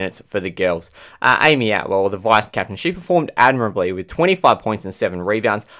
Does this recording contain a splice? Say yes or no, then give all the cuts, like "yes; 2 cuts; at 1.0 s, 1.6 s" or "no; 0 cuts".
no; 0 cuts